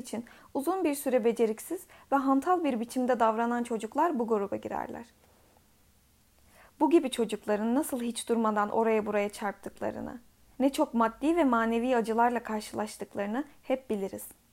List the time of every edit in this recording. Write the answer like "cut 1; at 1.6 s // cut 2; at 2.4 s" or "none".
cut 1; at 10.5 s